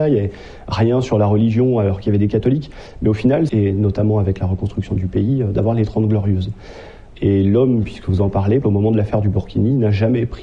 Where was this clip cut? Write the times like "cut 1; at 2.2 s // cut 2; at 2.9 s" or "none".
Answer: cut 1; at 3.5 s // cut 2; at 7.1 s // cut 3; at 8.6 s